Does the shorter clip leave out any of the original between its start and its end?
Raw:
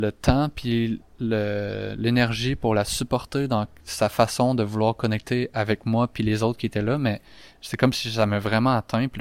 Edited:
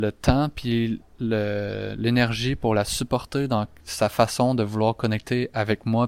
no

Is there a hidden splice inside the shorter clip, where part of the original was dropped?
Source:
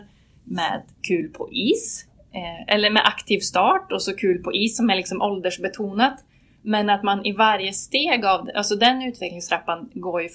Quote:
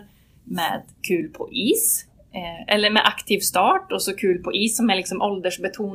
no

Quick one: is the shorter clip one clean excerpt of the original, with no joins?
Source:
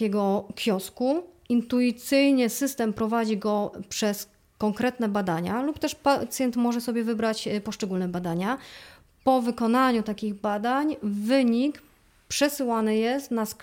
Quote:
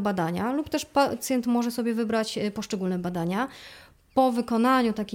yes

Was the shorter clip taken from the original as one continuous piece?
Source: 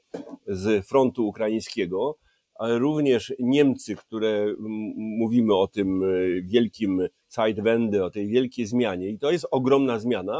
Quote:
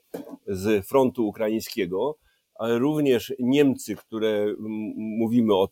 yes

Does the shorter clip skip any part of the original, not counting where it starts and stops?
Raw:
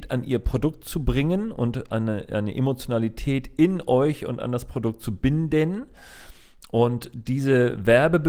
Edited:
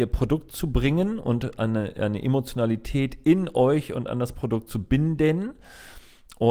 no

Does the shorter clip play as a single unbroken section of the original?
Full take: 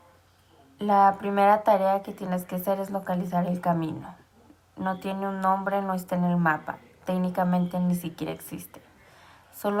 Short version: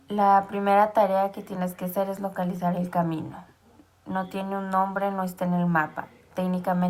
yes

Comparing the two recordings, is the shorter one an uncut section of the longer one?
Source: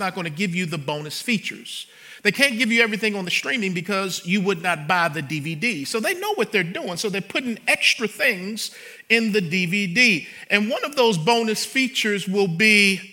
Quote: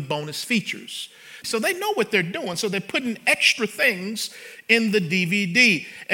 no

